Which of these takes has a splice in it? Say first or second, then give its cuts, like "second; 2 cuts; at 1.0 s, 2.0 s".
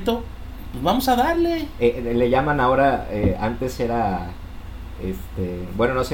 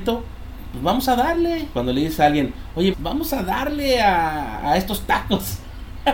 second; 2 cuts; at 1.7 s, 2.9 s